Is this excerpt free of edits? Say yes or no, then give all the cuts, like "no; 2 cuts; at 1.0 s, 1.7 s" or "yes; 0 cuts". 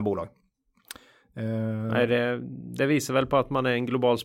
yes; 0 cuts